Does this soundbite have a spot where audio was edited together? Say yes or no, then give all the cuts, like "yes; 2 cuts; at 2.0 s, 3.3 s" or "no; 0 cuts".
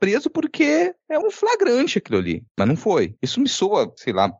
yes; 2 cuts; at 1.2 s, 3.2 s